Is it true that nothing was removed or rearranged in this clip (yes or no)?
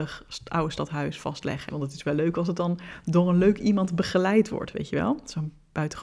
no